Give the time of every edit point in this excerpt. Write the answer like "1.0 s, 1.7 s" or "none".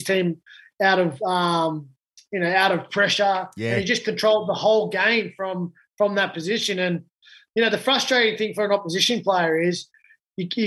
none